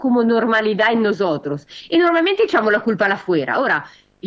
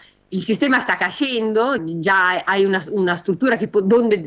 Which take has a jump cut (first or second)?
second